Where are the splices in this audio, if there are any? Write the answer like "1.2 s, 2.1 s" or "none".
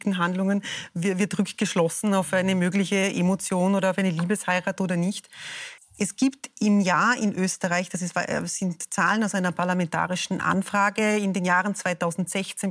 5.8 s